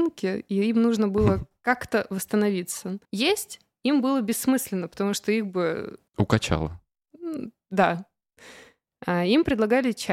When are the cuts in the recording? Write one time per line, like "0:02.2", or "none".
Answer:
0:03.0
0:06.1